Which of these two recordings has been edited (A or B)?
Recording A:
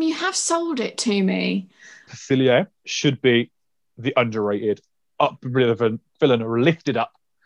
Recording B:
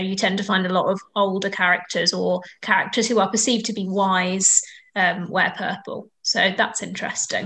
A